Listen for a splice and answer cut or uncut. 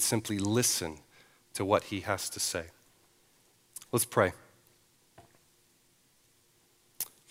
uncut